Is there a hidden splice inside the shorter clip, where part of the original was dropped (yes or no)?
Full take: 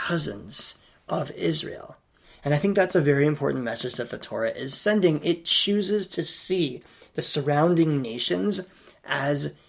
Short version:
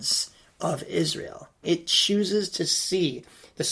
yes